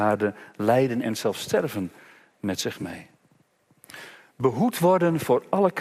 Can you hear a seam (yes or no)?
no